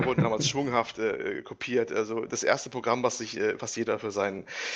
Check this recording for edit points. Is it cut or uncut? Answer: uncut